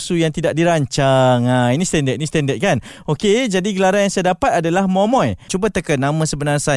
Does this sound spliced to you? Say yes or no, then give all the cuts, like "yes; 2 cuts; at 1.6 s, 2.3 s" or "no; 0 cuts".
yes; 1 cut; at 5.5 s